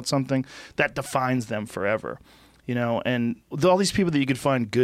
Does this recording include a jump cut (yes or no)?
yes